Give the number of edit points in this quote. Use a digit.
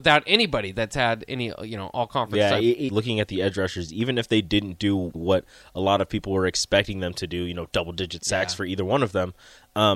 2